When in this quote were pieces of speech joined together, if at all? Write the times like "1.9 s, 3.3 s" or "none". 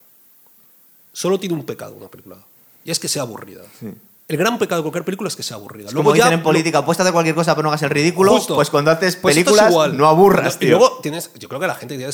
none